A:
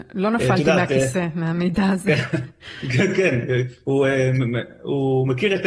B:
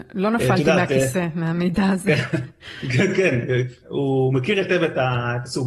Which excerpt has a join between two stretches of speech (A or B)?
B